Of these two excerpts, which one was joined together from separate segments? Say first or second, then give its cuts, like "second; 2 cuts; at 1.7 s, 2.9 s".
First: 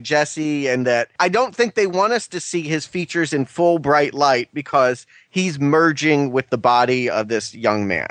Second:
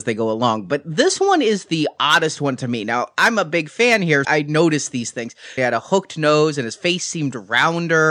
second; 2 cuts; at 4.2 s, 5.6 s